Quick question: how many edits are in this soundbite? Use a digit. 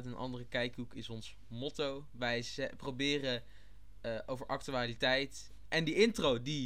1